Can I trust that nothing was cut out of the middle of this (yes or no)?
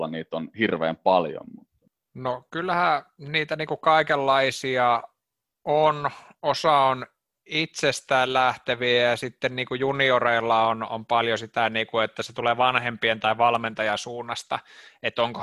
yes